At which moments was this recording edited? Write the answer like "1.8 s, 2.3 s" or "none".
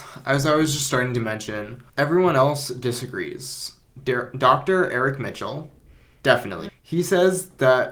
6.7 s

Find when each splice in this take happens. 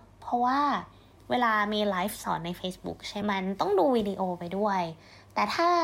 3.2 s

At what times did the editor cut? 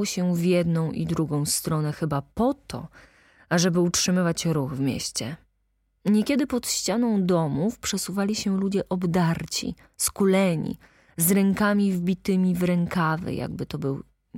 none

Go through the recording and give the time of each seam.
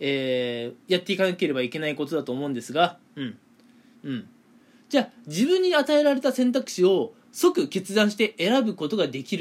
3.9 s

